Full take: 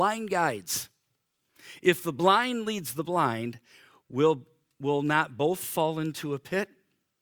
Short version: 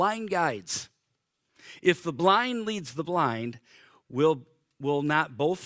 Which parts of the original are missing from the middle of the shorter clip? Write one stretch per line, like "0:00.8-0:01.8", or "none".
none